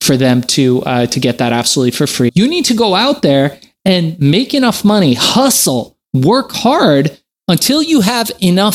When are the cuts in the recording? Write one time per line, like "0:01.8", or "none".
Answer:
0:02.3